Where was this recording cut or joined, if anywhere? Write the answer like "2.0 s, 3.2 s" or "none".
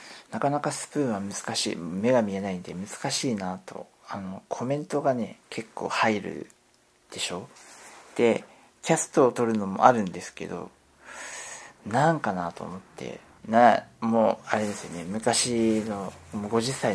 13.4 s